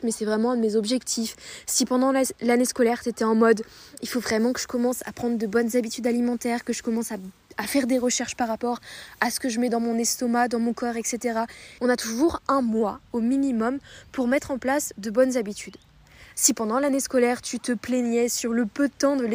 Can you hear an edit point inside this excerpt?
yes; 2 cuts; at 11.8 s, 16.3 s

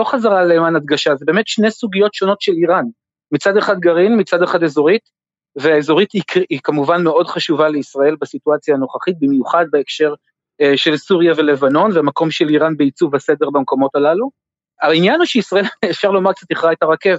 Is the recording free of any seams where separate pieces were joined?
yes; 0 cuts

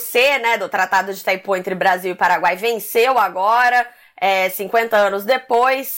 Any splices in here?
no; 0 cuts

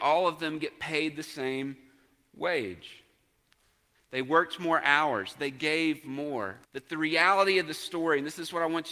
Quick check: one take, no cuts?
no; 2 cuts; at 3.9 s, 6.6 s

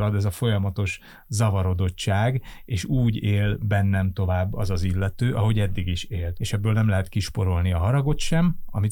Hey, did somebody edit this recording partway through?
yes; 1 cut; at 6.4 s

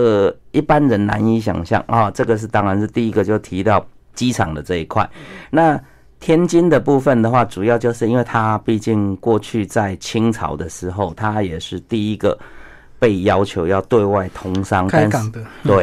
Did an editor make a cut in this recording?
no; 0 cuts

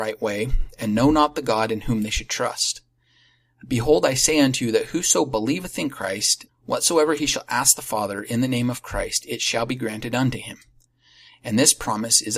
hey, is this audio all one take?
no; 1 cut; at 6.5 s

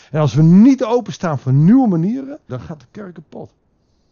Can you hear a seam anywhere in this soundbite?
yes; 1 cut; at 2.5 s

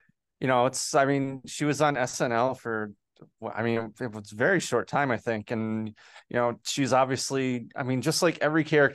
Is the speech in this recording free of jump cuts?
yes; 0 cuts

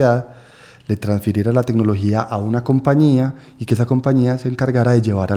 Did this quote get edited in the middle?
no; 0 cuts

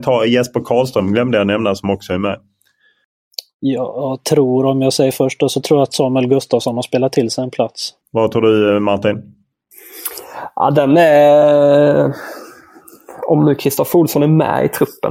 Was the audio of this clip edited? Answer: yes; 1 cut; at 8.0 s

